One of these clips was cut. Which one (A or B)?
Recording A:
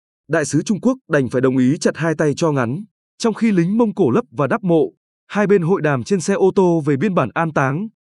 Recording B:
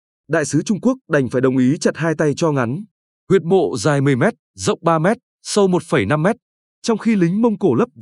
A